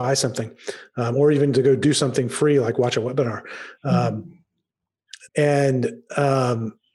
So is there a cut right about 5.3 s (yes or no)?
yes